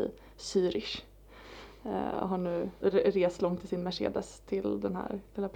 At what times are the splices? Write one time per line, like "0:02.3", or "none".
0:02.8